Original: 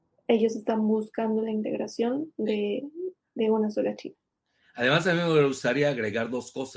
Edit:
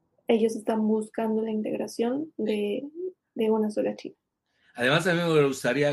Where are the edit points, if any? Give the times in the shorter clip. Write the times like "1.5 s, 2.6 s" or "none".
none